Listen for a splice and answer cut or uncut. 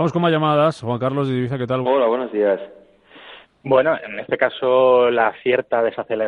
cut